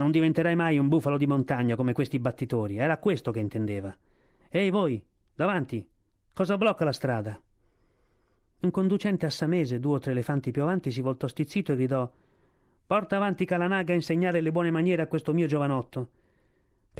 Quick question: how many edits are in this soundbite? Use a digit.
0